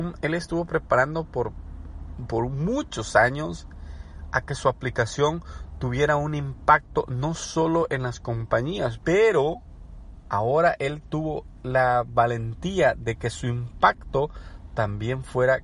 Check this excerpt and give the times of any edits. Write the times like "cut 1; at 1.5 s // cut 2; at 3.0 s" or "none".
cut 1; at 9.0 s